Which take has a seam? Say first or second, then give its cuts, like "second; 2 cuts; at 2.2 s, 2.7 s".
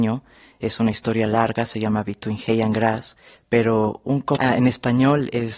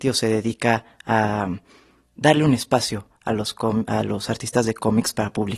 first; 1 cut; at 4.4 s